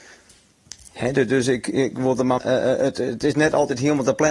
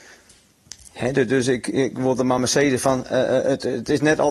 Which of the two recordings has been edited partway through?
first; 1 cut; at 2.4 s

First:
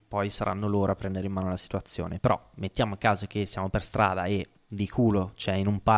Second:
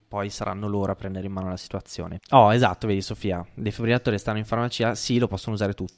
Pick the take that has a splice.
second; 1 cut; at 2.2 s

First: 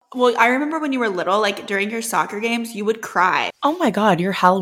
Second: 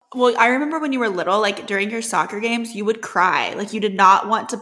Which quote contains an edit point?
first; 1 cut; at 3.5 s

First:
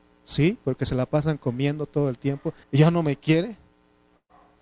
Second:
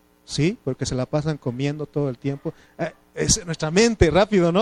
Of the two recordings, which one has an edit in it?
first; 1 cut; at 2.6 s

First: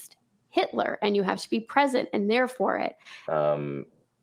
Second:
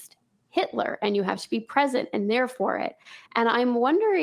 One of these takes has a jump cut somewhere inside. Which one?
first; 1 cut; at 3.3 s

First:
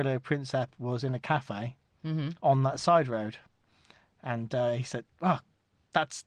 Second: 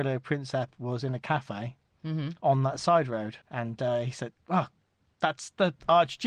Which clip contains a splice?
second; 1 cut; at 3.4 s

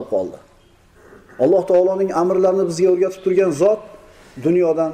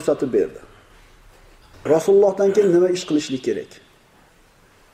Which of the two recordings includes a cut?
second; 1 cut; at 1.9 s

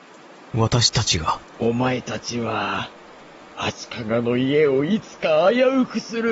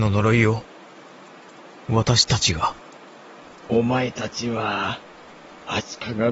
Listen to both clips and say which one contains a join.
first; 1 cut; at 1.5 s

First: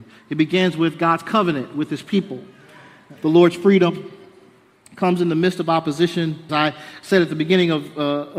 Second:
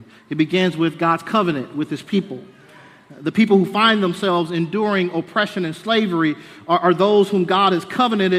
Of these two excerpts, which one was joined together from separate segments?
first; 2 cuts; at 3.2 s, 6.5 s

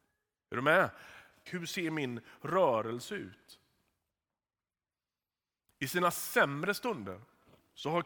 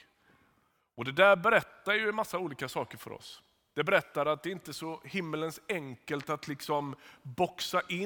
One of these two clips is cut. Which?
first; 1 cut; at 1.5 s

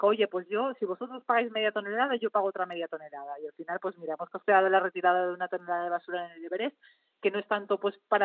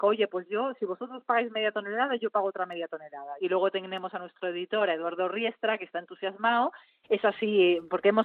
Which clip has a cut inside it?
second; 2 cuts; at 3.4 s, 7.0 s

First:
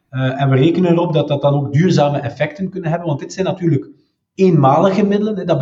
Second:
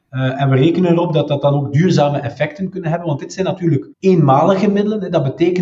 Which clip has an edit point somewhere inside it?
second; 1 cut; at 3.9 s

